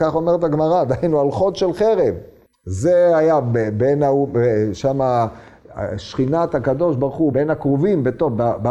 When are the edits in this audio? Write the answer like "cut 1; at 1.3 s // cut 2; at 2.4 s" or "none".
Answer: cut 1; at 7.3 s